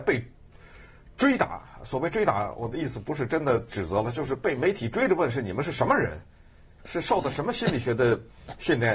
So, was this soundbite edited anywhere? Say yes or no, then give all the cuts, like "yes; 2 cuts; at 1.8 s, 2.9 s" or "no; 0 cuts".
yes; 1 cut; at 6.8 s